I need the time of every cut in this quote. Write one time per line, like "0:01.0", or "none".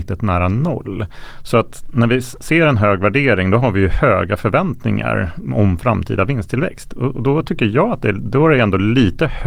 0:01.4